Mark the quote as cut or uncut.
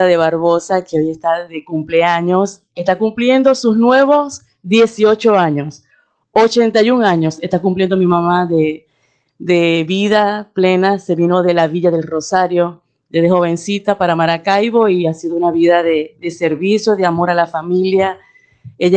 uncut